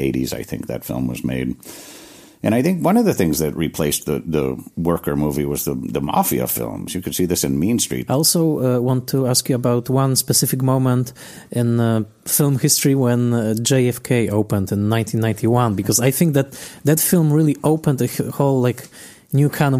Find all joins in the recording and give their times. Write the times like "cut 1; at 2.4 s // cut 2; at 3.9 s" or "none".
cut 1; at 8.1 s